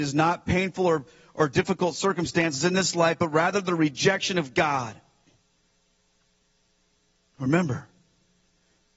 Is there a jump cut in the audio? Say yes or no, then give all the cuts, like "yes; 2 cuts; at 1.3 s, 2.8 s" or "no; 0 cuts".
no; 0 cuts